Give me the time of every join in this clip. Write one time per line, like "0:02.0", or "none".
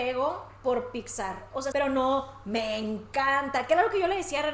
0:01.7

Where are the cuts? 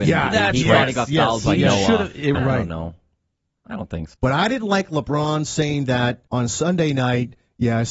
0:02.3
0:04.1
0:06.3

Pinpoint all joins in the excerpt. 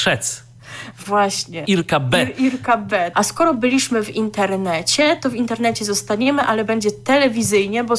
0:01.6
0:03.1

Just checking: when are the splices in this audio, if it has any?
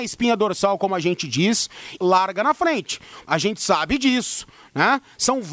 0:02.0
0:03.2

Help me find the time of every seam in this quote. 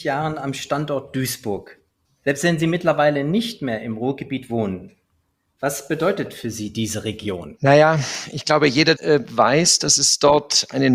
0:02.0
0:07.6
0:08.9

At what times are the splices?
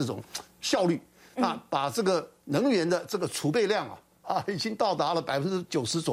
none

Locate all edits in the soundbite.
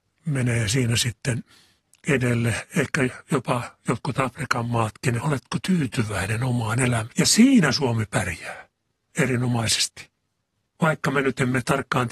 0:05.2
0:07.1

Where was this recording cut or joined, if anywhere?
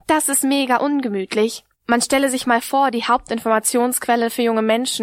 0:01.7

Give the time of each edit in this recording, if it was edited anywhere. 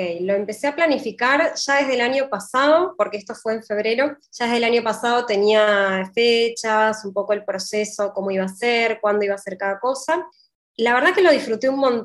none

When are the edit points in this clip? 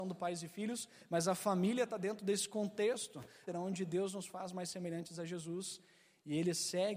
0:03.5

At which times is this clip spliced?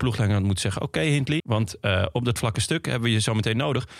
0:01.4

